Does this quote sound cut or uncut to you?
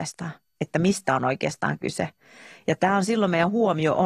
uncut